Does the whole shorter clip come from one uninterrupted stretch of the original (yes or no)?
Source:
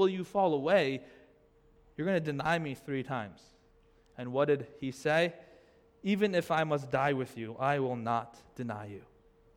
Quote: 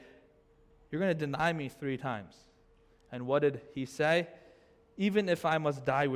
yes